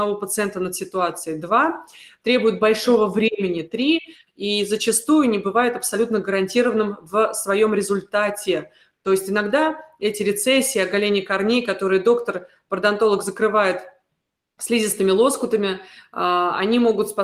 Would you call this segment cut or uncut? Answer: uncut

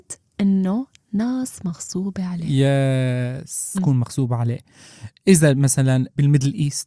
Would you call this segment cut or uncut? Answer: cut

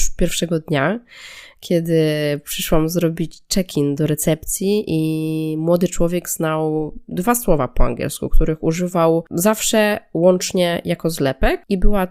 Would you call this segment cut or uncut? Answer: cut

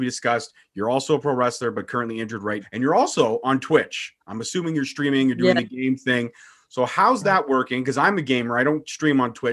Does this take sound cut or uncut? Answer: cut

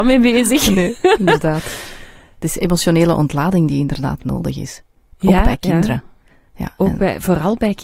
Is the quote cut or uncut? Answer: uncut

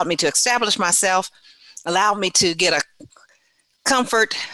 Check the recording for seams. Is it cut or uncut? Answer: uncut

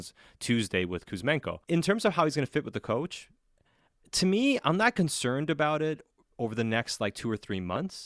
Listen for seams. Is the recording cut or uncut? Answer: cut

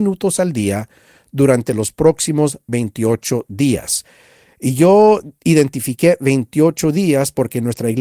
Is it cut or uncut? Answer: uncut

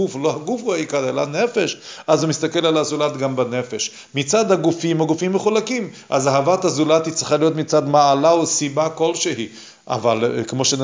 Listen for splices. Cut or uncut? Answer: uncut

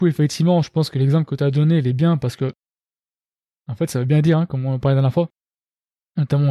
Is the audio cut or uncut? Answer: uncut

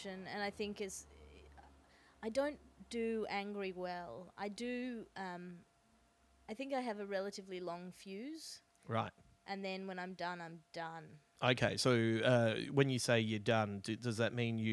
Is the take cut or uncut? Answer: uncut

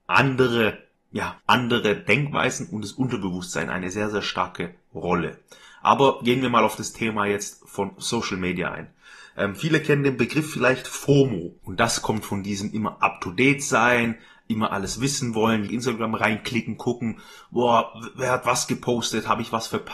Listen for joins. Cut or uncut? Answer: cut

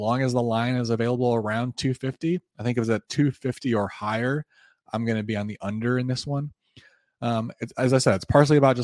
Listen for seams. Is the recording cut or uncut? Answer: uncut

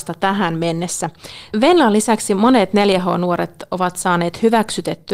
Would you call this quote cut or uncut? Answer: cut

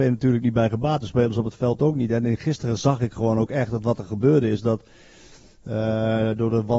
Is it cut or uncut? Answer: uncut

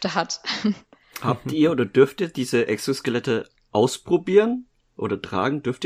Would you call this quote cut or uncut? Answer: uncut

